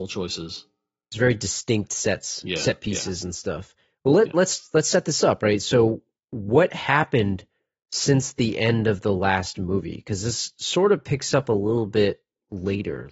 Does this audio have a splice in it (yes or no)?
no